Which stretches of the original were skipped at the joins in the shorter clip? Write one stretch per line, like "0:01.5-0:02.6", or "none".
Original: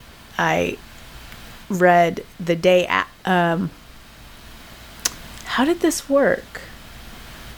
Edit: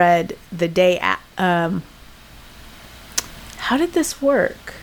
none